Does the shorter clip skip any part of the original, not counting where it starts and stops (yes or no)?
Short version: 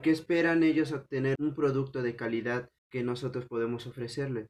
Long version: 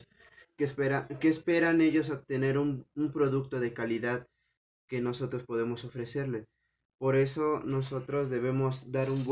yes